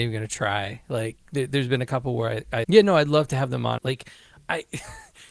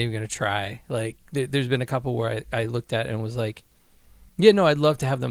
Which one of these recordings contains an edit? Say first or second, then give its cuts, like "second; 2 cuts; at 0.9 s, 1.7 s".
first; 2 cuts; at 2.6 s, 3.8 s